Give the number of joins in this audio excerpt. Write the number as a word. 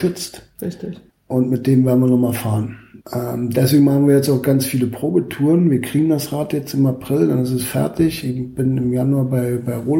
two